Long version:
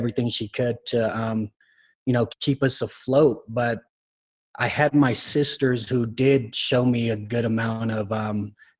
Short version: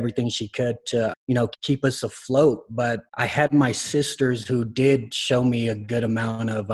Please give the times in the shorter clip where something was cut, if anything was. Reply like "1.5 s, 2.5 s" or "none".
1.1 s, 3.1 s